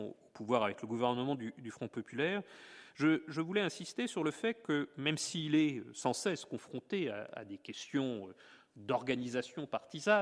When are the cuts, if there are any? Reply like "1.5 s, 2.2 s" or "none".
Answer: none